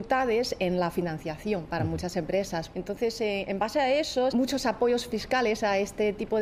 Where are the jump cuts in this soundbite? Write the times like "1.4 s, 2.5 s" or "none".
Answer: 2.7 s, 4.3 s

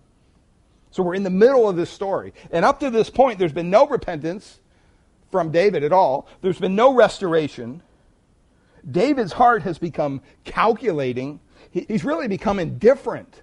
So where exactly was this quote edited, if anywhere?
11.9 s

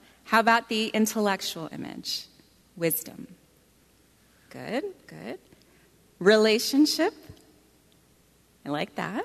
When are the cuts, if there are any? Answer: none

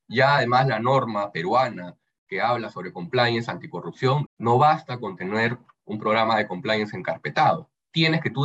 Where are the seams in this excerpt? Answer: 4.3 s

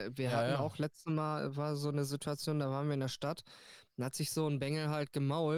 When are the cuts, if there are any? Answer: none

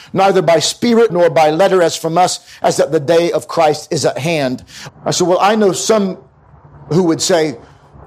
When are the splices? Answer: 1.1 s, 4.9 s

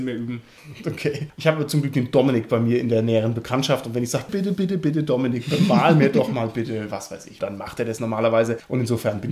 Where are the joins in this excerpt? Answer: 4.3 s, 7.4 s

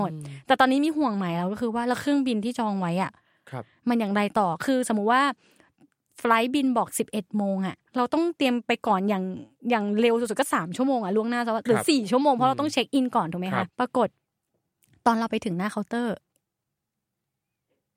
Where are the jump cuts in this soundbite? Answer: 7.9 s, 13.7 s

